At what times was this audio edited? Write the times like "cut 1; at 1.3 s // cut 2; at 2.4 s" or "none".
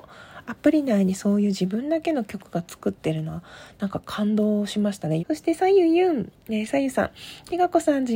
cut 1; at 5.2 s